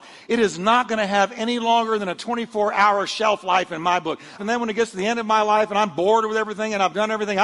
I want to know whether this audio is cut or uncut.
cut